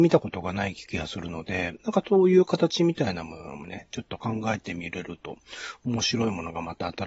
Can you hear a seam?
no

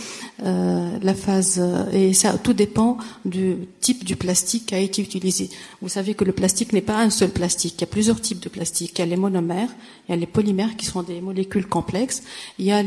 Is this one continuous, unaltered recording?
yes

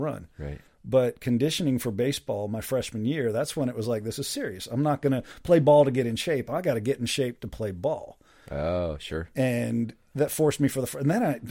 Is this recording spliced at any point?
no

